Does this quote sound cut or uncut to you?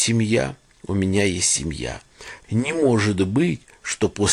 cut